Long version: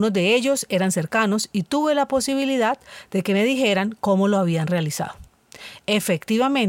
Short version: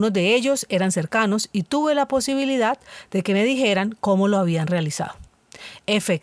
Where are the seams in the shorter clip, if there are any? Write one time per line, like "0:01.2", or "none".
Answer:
none